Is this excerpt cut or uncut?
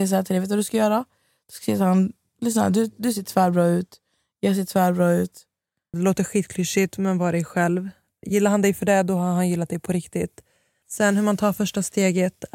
cut